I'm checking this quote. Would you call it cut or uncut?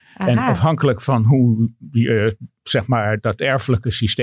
uncut